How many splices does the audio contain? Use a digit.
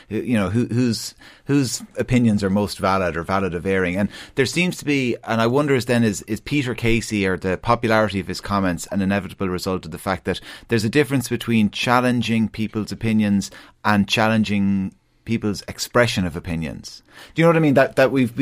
0